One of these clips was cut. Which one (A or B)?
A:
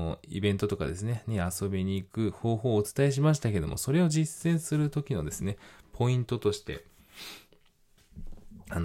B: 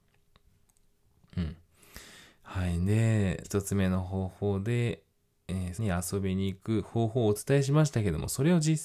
B